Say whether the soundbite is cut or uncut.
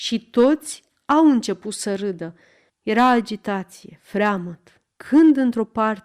cut